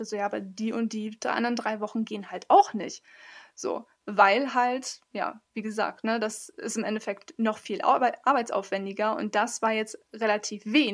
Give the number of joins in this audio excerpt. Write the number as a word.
zero